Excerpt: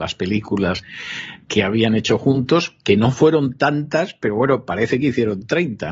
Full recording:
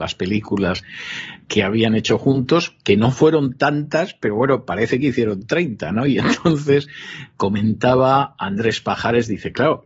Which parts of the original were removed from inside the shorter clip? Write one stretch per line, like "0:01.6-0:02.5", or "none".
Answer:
none